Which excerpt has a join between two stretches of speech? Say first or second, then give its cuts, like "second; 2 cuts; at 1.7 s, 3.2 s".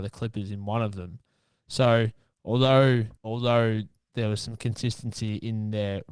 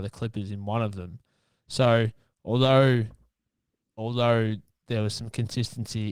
first; 1 cut; at 3.2 s